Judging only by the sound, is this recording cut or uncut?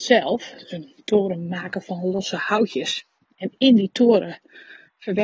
uncut